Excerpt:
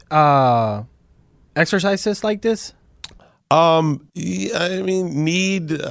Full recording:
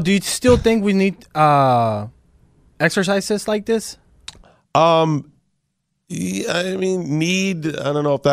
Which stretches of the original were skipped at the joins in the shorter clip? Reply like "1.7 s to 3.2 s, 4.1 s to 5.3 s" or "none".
5.3 s to 6.0 s